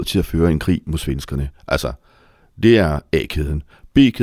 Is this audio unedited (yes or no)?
yes